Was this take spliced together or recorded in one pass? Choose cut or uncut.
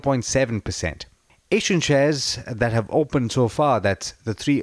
uncut